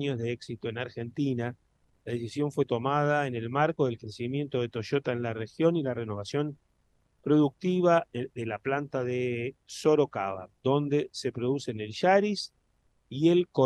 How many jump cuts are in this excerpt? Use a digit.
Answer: 0